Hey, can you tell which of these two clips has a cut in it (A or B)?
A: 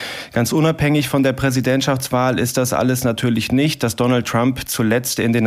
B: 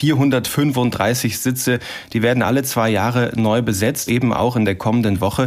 B